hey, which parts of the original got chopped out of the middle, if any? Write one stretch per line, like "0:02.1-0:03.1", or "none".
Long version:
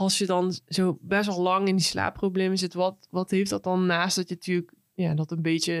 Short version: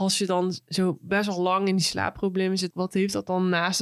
0:02.7-0:03.1